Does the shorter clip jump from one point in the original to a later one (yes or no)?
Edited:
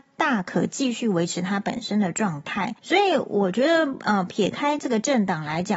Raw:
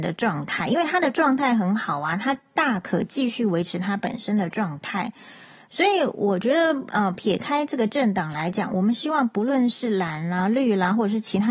yes